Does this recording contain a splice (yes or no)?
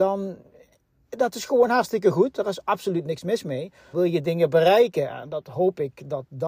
yes